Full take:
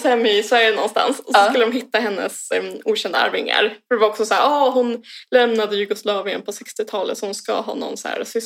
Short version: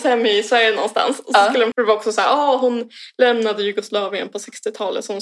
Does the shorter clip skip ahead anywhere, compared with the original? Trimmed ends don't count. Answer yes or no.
yes